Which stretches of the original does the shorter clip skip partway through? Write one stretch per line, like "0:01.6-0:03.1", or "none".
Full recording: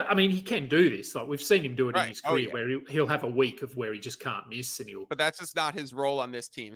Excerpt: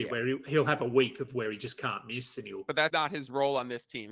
0:05.3-0:05.5